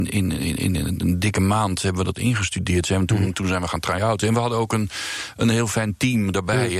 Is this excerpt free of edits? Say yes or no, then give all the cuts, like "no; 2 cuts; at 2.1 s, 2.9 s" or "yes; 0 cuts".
yes; 0 cuts